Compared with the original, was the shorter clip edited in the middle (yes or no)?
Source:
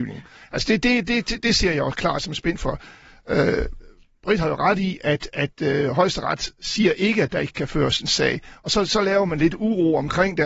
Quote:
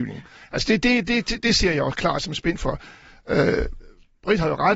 no